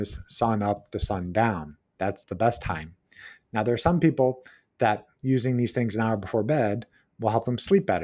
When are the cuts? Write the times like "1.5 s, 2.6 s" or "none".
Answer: none